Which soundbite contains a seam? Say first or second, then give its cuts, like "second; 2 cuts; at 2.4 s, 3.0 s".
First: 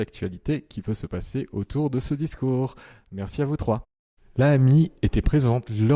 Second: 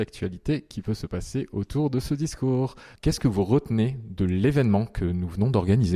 second; 1 cut; at 2.9 s